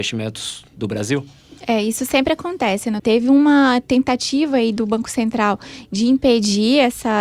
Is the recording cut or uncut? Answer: cut